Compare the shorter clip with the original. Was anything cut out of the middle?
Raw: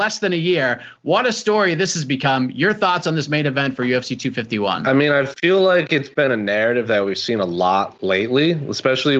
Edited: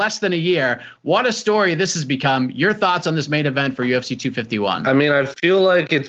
no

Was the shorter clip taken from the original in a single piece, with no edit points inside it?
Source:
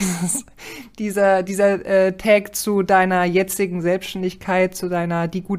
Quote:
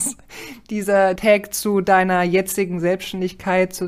no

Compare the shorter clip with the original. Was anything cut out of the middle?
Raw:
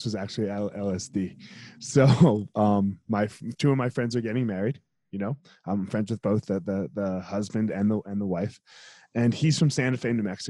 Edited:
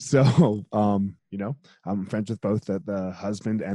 yes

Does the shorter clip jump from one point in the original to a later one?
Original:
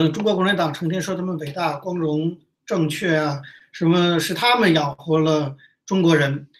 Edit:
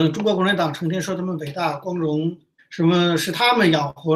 yes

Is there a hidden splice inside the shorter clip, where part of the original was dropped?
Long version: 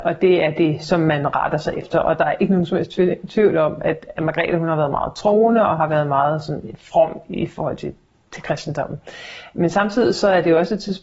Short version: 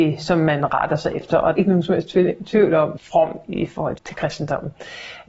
yes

